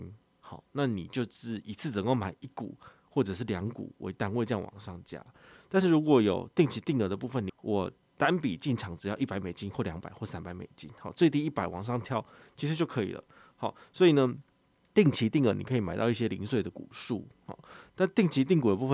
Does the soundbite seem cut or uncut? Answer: cut